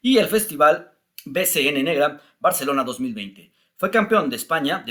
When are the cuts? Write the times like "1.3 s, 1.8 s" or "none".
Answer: none